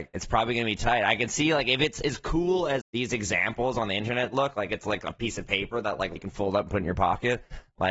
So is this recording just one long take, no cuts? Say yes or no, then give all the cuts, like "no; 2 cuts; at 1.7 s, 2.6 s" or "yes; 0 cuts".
no; 2 cuts; at 2.8 s, 6.2 s